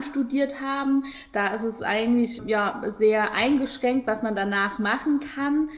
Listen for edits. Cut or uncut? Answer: cut